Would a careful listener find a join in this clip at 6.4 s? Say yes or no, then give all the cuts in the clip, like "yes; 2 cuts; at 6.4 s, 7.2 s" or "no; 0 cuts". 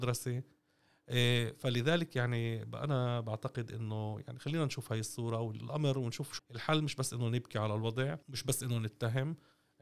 yes; 2 cuts; at 6.4 s, 8.2 s